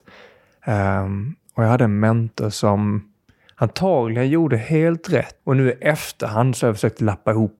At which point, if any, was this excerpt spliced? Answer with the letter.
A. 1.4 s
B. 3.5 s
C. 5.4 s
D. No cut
C